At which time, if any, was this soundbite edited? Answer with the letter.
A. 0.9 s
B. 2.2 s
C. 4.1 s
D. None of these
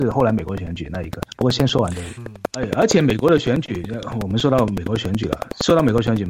B